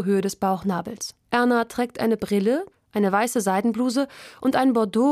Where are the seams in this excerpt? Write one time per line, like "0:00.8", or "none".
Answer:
0:01.2
0:02.7